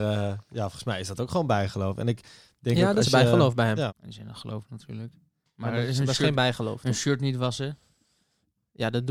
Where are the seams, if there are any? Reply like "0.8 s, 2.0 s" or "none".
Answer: 3.9 s